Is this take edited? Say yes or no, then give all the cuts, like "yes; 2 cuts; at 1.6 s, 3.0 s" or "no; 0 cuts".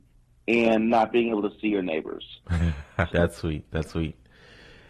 yes; 1 cut; at 3.1 s